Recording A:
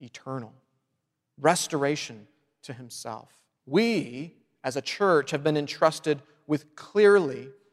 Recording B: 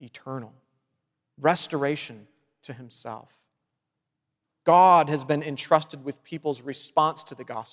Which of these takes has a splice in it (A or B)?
A